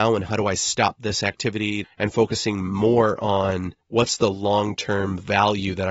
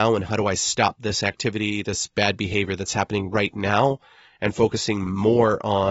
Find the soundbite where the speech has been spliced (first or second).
first